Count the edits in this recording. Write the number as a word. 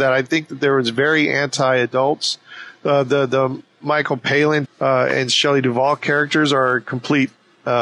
one